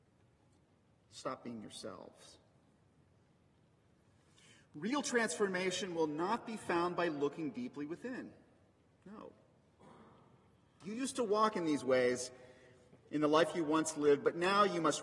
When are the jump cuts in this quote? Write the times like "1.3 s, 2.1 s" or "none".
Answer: 10.8 s